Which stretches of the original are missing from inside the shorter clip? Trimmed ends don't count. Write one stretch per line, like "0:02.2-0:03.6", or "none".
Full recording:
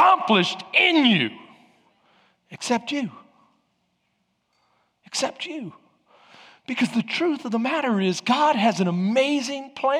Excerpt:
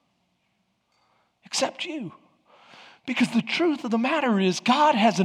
none